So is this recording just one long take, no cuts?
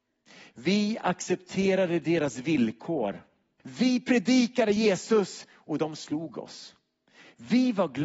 no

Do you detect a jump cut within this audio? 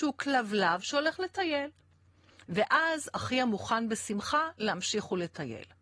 no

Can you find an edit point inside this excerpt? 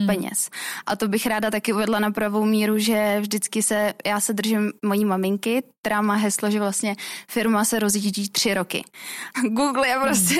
yes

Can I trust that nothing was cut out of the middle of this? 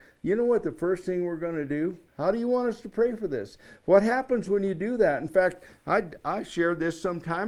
no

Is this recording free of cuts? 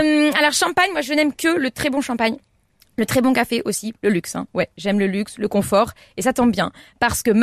yes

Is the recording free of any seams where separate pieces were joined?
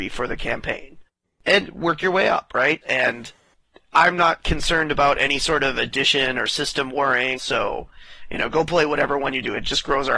no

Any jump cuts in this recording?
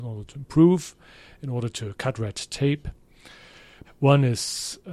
yes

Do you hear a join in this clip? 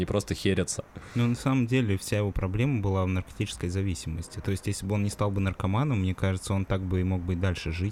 no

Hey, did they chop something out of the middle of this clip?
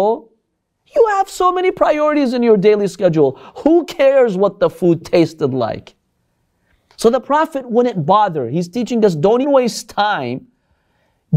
yes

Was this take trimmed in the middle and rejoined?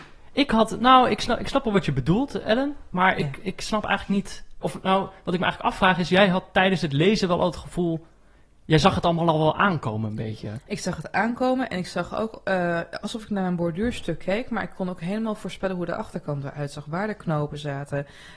yes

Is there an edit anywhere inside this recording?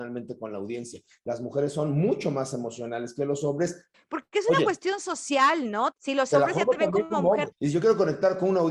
yes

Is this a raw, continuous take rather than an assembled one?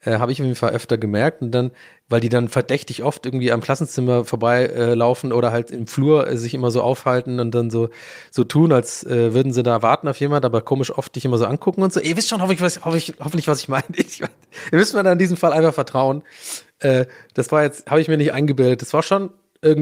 yes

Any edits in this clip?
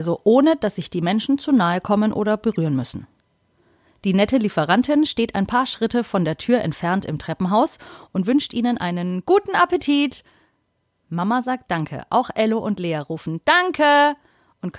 no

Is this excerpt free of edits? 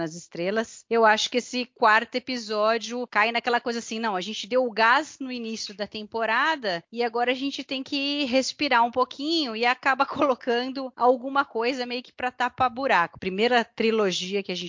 no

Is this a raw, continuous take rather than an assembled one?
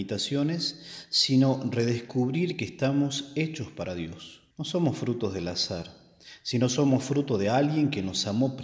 no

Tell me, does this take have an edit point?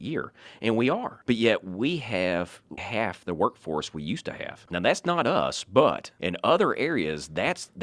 yes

